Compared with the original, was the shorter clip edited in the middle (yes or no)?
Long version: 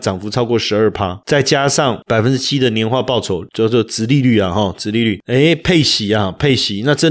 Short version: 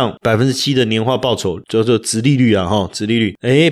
no